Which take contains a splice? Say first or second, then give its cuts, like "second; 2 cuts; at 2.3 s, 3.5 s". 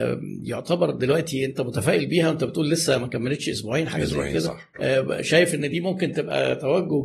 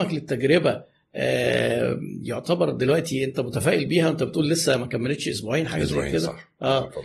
first; 1 cut; at 4.7 s